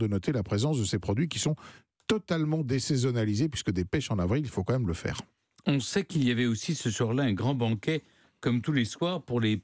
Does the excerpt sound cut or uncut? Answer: uncut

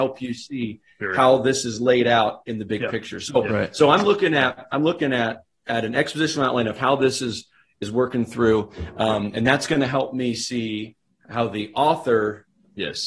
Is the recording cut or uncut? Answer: uncut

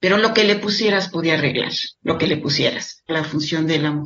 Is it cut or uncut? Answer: cut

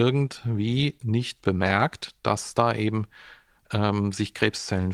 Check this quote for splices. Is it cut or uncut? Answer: uncut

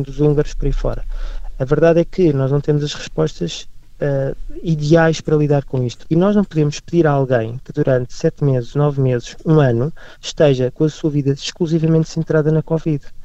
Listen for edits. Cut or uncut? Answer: cut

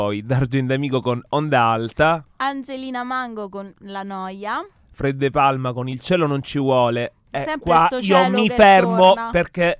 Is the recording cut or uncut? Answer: uncut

